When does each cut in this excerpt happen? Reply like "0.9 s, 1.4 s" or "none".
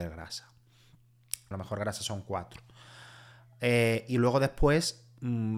1.5 s